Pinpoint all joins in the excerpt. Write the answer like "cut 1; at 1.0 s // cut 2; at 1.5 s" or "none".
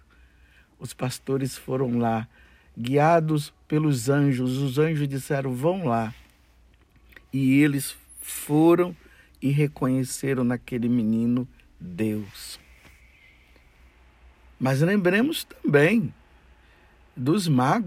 none